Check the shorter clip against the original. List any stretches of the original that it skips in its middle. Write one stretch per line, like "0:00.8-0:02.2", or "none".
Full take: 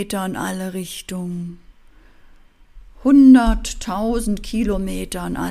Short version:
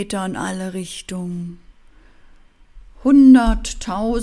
none